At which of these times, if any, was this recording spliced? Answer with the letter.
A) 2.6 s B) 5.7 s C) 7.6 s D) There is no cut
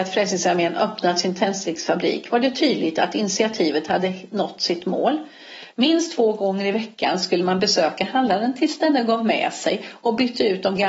B